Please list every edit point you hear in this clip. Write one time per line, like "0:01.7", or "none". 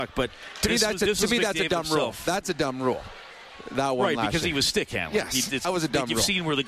0:05.6